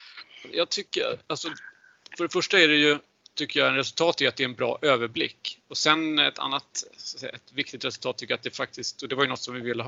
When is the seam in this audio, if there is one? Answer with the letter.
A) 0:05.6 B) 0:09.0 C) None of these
A